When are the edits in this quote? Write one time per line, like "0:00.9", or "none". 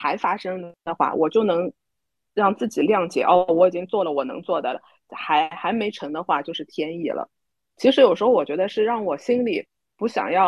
none